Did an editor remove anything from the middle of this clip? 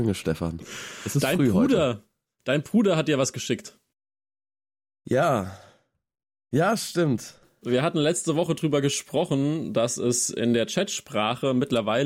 no; 0 cuts

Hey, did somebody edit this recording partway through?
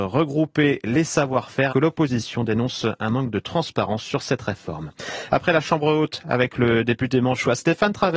yes; 2 cuts; at 1.7 s, 6.2 s

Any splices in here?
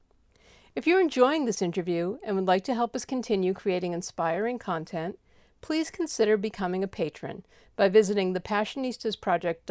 no; 0 cuts

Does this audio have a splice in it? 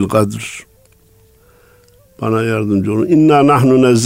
no; 0 cuts

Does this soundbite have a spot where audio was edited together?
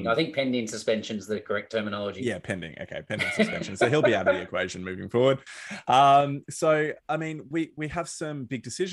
no; 0 cuts

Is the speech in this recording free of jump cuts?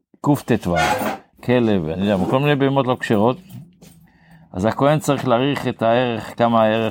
no; 1 cut; at 1.3 s

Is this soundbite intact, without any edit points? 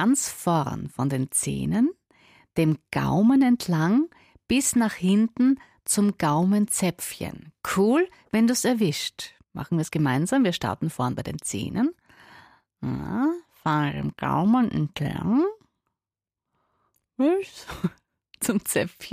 no; 1 cut; at 9.4 s

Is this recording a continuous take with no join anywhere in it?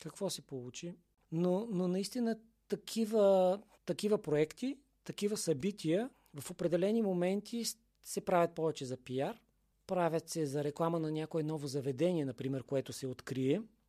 no; 1 cut; at 1.2 s

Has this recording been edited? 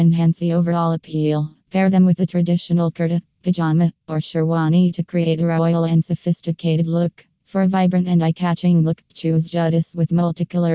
yes; 2 cuts; at 1.6 s, 7.4 s

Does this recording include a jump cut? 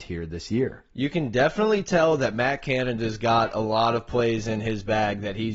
no; 0 cuts

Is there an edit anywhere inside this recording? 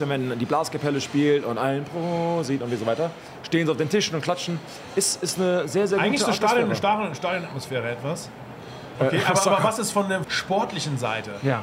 yes; 2 cuts; at 9.0 s, 10.2 s

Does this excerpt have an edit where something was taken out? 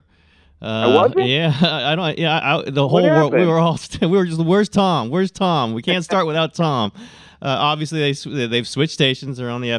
no; 0 cuts

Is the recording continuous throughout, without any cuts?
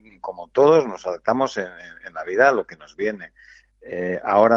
yes; 0 cuts

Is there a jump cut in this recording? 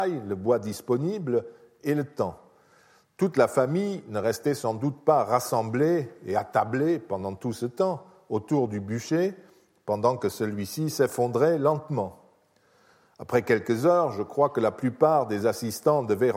no; 0 cuts

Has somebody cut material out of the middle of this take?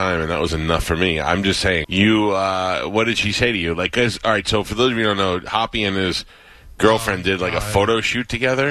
yes; 1 cut; at 1.8 s

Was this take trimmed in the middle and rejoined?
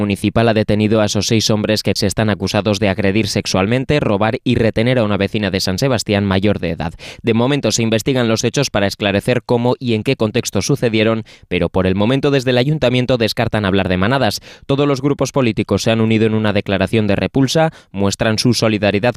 yes; 1 cut; at 2.0 s

